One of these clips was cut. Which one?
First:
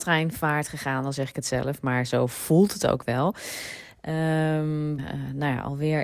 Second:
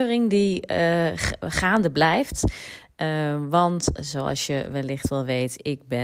first; 1 cut; at 5.0 s

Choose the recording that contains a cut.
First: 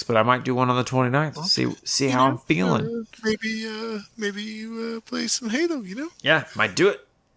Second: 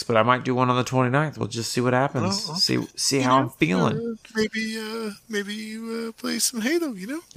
first; 1 cut; at 1.4 s

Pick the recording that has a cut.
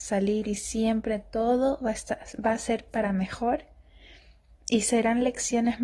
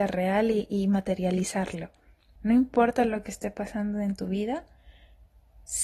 second; 1 cut; at 2.4 s

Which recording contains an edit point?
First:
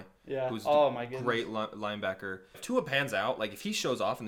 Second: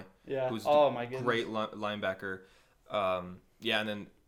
first; 1 cut; at 2.5 s

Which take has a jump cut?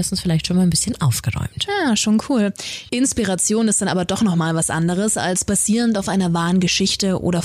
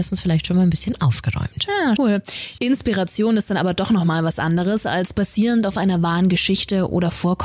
second; 1 cut; at 2.0 s

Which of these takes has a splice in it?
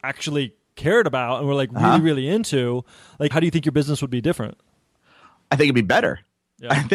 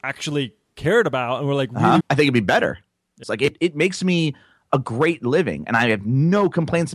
second; 2 cuts; at 2.0 s, 3.2 s

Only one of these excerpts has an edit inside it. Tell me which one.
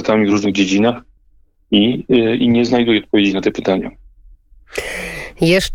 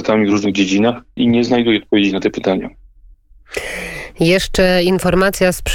second; 1 cut; at 1.2 s

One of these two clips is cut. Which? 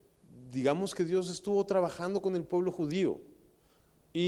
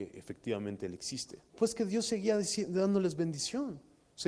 second; 1 cut; at 1.5 s

